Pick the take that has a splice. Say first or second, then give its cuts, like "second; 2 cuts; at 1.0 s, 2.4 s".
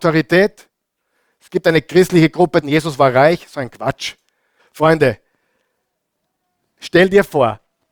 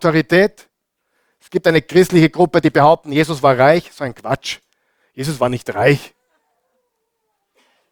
first; 2 cuts; at 2.6 s, 4.6 s